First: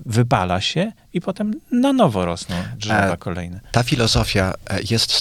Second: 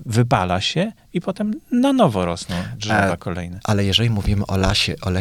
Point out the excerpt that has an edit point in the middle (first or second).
second